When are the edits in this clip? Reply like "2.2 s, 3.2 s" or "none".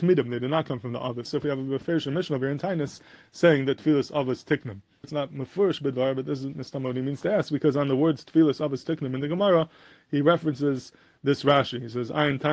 1.3 s, 5.0 s